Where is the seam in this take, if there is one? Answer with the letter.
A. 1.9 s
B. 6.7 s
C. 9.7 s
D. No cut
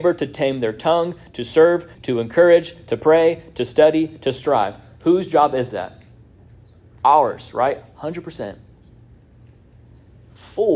A